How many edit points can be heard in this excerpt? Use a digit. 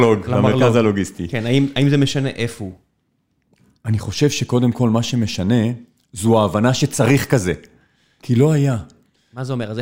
1